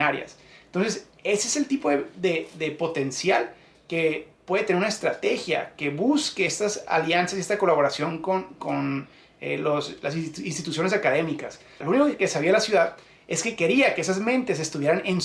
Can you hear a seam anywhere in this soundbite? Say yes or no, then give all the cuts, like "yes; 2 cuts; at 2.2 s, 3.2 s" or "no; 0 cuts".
yes; 2 cuts; at 8.6 s, 11.8 s